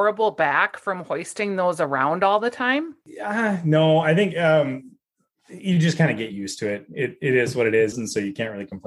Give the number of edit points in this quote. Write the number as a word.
one